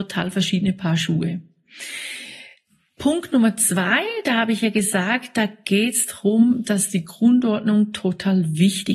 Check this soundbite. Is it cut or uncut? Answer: uncut